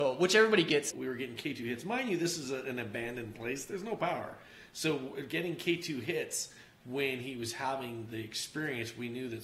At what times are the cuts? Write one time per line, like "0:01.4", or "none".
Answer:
0:00.9